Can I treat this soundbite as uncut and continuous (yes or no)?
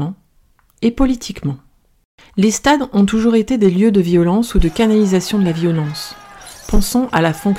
yes